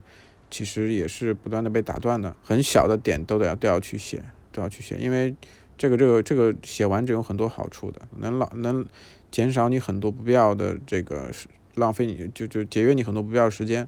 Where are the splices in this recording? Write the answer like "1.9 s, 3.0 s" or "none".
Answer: 2.3 s, 8.1 s